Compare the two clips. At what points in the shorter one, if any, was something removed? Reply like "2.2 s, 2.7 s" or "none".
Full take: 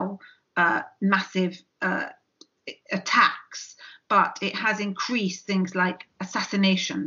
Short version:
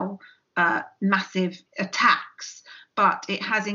1.7 s